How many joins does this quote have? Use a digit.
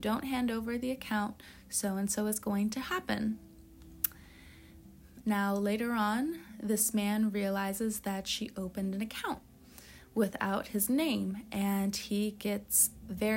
1